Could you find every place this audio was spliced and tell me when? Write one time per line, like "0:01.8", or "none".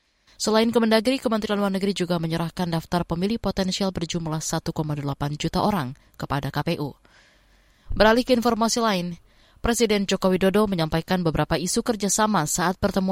none